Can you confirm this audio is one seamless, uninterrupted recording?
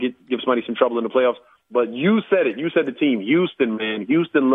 yes; 0 cuts

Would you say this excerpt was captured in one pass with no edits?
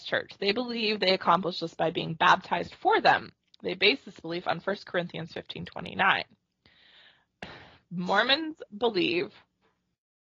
yes; 0 cuts

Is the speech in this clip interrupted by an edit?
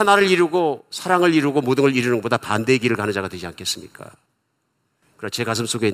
no; 0 cuts

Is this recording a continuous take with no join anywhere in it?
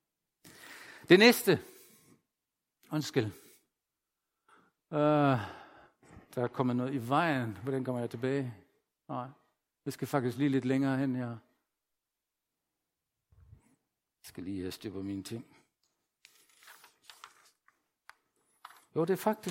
yes; 0 cuts

